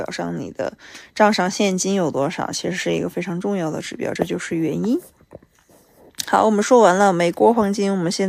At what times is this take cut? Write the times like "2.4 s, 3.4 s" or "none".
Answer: none